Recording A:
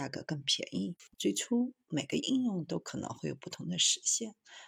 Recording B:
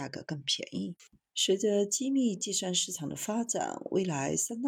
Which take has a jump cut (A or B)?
A